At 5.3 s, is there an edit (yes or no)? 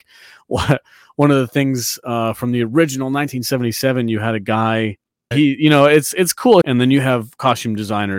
yes